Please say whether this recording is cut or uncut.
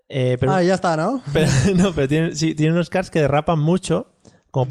uncut